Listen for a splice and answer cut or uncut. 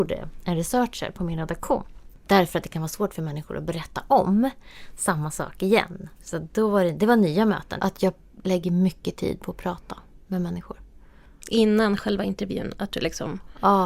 cut